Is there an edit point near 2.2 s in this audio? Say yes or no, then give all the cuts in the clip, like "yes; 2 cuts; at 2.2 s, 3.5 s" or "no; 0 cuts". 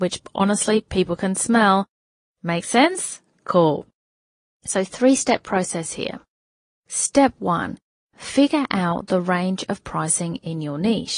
yes; 2 cuts; at 2.2 s, 4.5 s